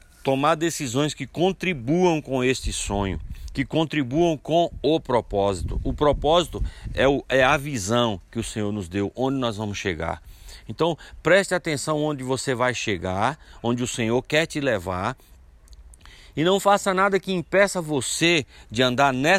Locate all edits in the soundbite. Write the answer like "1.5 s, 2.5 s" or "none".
none